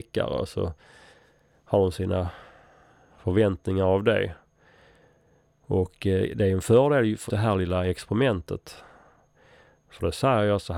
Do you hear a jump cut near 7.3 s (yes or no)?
yes